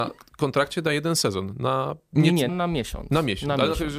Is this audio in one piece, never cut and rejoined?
no; 1 cut; at 2.5 s

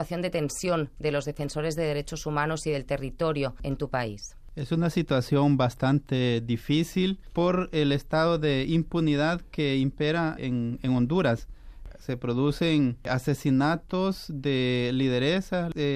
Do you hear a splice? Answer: yes; 1 cut; at 10.4 s

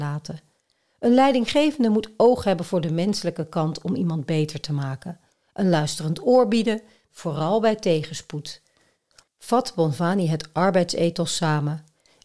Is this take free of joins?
no; 2 cuts; at 7.1 s, 9.2 s

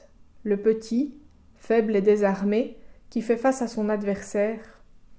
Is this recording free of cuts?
yes; 0 cuts

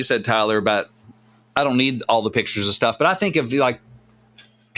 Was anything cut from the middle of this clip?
no; 0 cuts

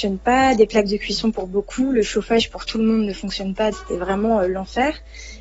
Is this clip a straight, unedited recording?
no; 1 cut; at 3.7 s

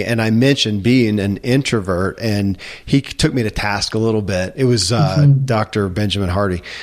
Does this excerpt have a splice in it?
no; 0 cuts

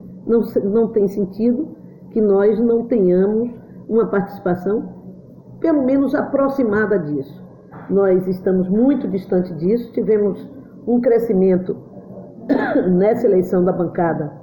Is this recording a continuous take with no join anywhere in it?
yes; 0 cuts

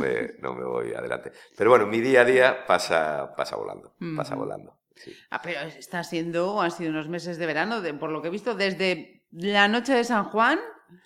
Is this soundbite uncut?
no; 1 cut; at 3.3 s

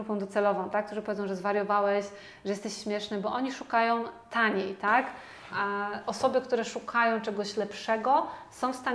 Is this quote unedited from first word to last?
no; 1 cut; at 5.5 s

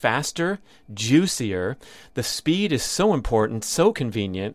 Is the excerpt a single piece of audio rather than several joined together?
yes; 0 cuts

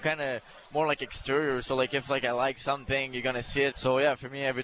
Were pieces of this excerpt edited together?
yes; 1 cut; at 3.7 s

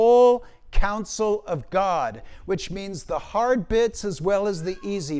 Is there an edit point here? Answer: no; 0 cuts

